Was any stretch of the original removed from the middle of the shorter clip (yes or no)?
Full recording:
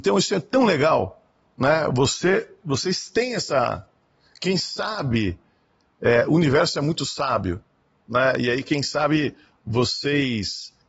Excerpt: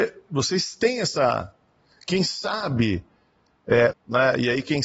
yes